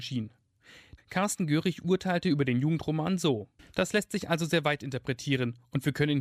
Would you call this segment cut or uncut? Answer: cut